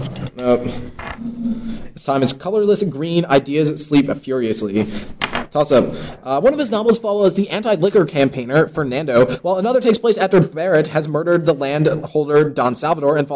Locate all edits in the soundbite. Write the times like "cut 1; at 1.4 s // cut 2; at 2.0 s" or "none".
none